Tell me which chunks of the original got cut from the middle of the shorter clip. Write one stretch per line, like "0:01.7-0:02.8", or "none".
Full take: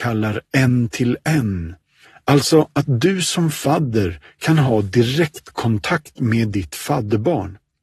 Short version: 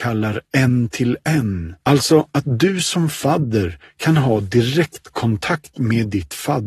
0:01.8-0:02.2